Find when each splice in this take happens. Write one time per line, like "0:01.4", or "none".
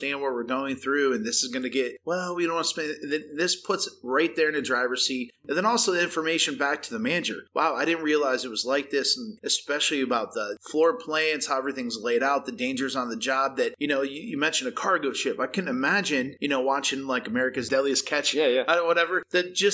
0:09.4